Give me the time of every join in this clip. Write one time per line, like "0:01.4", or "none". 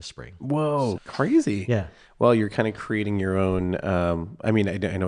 0:01.0